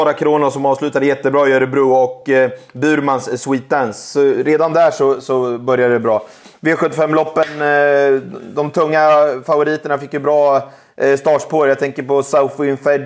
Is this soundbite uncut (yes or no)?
yes